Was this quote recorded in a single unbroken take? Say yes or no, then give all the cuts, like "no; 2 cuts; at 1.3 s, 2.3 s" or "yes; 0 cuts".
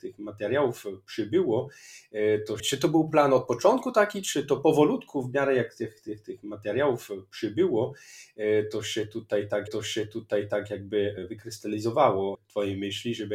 yes; 0 cuts